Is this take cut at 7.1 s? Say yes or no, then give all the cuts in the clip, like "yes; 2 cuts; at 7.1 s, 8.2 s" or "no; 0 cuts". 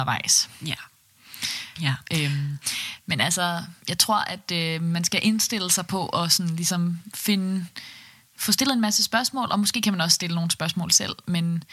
no; 2 cuts; at 1.8 s, 3.8 s